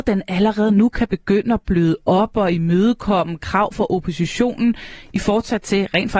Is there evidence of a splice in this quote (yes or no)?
no